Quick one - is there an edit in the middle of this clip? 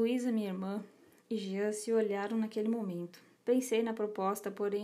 yes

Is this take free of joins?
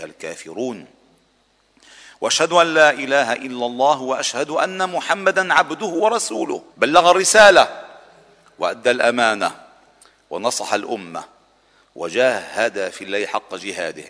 no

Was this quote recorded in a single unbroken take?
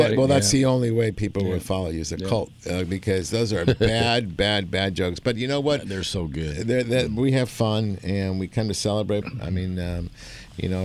no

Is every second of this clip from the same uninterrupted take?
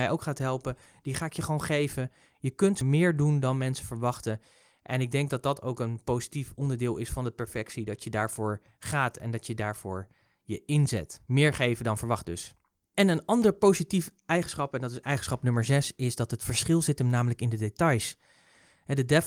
yes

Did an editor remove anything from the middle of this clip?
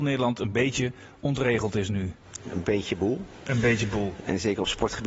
no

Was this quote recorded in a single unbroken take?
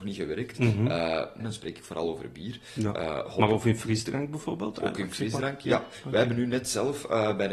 no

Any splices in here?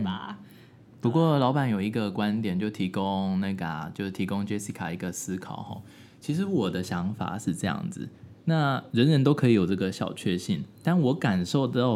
no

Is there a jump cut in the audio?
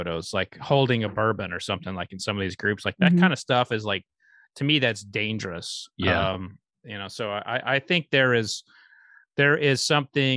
no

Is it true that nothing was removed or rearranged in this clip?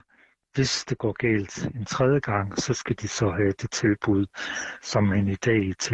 yes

